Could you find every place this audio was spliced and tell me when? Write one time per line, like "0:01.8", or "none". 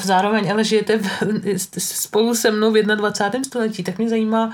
none